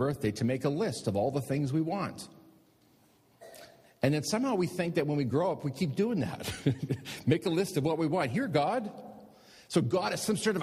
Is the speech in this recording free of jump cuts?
yes; 0 cuts

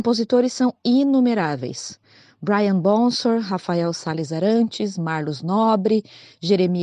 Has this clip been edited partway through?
no; 0 cuts

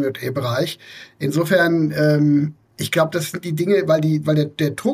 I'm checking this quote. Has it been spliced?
no; 0 cuts

